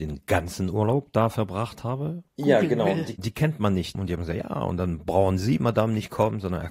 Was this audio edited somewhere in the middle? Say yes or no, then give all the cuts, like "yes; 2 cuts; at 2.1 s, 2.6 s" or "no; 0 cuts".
yes; 2 cuts; at 2.3 s, 3.9 s